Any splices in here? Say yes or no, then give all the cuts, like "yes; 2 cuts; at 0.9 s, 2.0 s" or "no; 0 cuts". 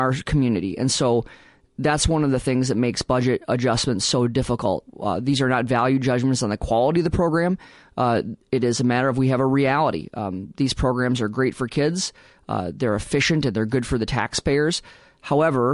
no; 0 cuts